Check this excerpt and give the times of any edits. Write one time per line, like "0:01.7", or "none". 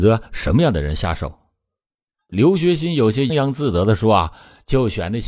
0:03.3